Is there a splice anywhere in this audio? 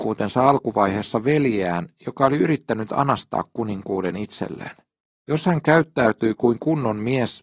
yes; 1 cut; at 5.1 s

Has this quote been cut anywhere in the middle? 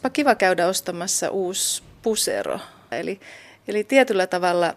yes; 1 cut; at 2.9 s

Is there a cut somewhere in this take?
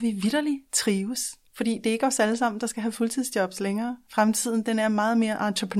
yes; 1 cut; at 1.5 s

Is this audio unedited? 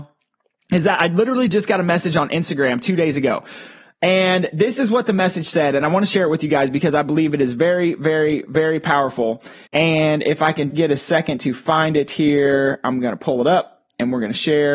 no; 2 cuts; at 9.7 s, 10.7 s

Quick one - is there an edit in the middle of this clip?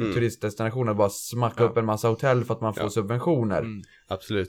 no; 0 cuts

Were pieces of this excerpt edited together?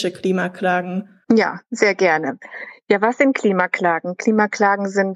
yes; 1 cut; at 1.2 s

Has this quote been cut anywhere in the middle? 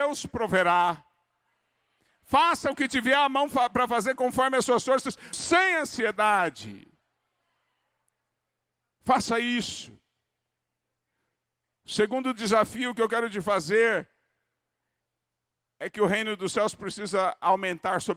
yes; 1 cut; at 5.3 s

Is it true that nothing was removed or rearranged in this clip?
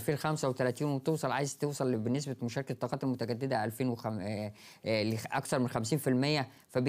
yes; 0 cuts

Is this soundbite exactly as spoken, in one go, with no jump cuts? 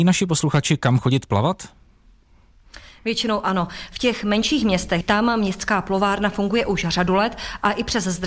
no; 1 cut; at 5.0 s

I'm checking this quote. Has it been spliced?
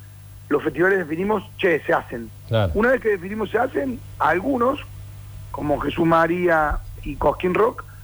yes; 1 cut; at 7.0 s

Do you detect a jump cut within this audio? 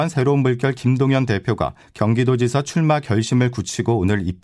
no; 0 cuts

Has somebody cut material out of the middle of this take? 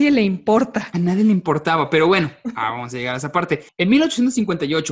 no; 0 cuts

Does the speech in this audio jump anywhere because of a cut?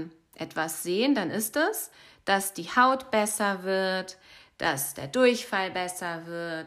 no; 0 cuts

